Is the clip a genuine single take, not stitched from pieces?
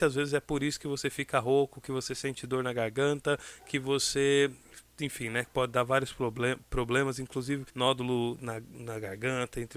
no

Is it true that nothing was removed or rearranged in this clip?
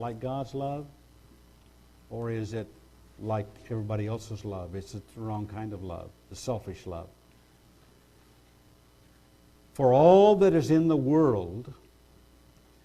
yes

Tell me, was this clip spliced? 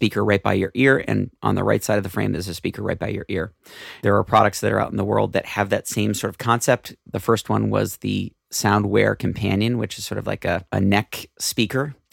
yes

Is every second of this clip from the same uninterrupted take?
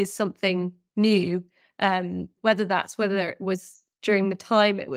no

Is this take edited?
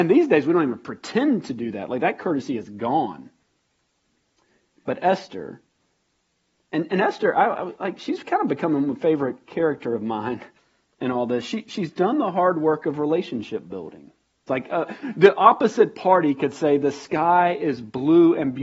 yes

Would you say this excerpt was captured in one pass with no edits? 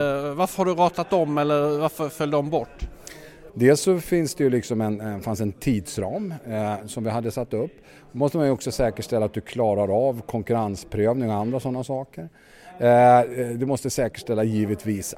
no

